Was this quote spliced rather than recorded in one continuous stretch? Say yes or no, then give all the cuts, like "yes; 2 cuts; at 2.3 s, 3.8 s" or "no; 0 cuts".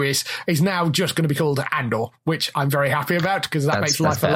no; 0 cuts